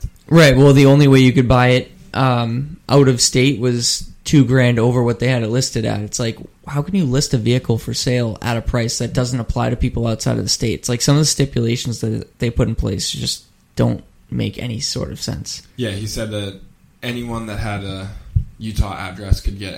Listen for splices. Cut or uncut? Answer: cut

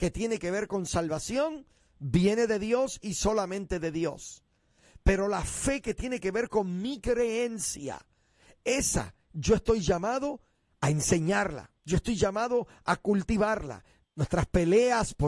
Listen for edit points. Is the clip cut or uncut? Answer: cut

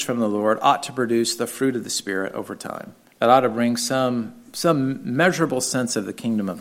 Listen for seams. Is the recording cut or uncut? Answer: cut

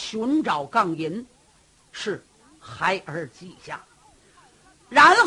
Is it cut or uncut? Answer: uncut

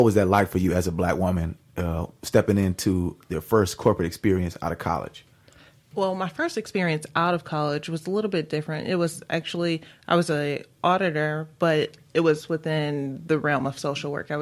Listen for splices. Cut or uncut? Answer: uncut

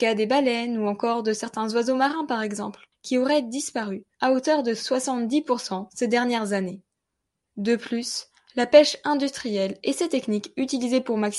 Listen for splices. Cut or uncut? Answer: uncut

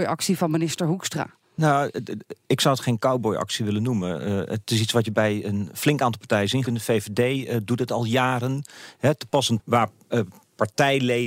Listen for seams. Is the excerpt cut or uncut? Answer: cut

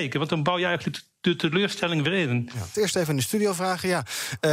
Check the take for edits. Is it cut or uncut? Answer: cut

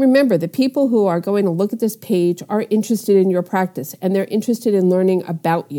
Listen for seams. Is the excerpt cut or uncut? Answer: uncut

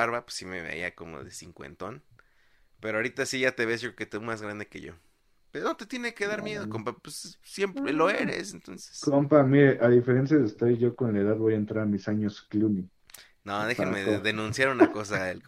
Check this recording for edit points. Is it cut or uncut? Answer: uncut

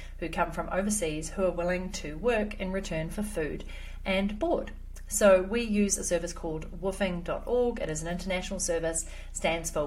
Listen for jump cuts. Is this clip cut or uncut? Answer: uncut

